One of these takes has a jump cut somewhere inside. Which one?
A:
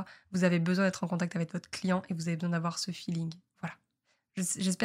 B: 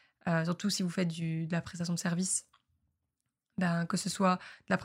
A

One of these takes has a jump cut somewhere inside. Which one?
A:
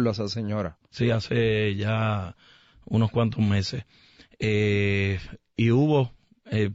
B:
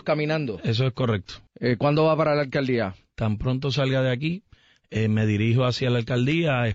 B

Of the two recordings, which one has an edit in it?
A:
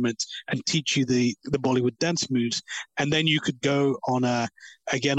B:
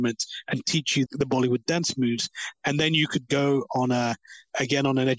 B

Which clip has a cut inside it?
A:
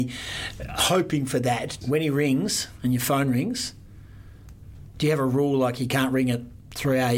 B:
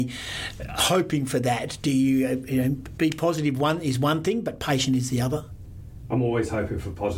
A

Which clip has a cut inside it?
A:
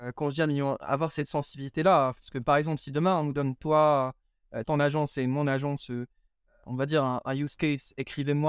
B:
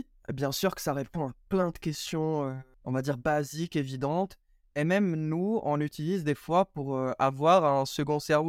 A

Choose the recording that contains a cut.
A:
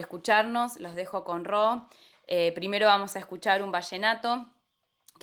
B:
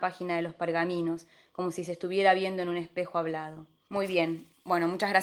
B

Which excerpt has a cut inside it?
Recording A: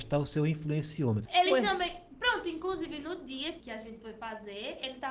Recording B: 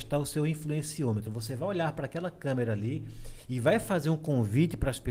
A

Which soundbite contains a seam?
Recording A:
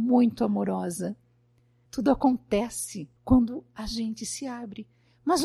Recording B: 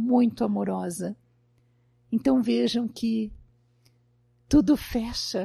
A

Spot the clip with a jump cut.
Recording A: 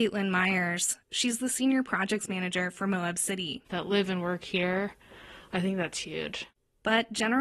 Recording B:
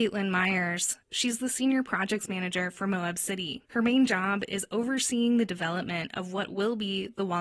A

